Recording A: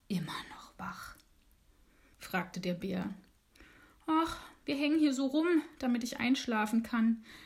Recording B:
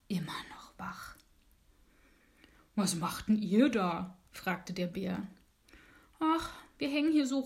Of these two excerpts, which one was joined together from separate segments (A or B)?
A